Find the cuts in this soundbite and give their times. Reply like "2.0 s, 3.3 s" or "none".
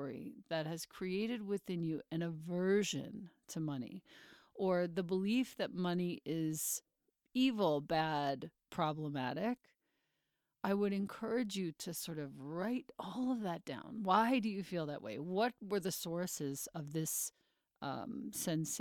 none